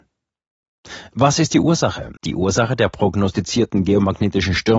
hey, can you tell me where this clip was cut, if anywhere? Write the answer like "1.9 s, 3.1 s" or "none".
2.2 s